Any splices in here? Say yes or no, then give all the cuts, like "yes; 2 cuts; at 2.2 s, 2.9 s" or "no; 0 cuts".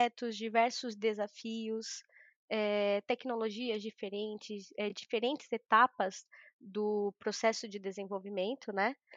no; 0 cuts